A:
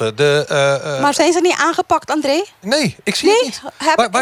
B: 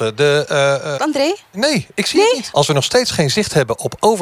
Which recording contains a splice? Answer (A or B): B